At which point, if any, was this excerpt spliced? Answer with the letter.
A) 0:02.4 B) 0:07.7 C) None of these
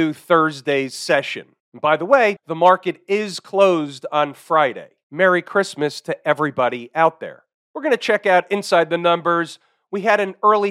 A